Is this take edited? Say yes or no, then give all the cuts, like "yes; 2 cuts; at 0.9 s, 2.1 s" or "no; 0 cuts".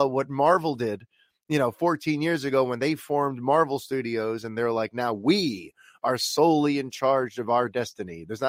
no; 0 cuts